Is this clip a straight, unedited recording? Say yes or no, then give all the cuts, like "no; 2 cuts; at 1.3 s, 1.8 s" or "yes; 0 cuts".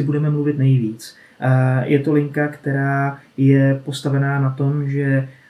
yes; 0 cuts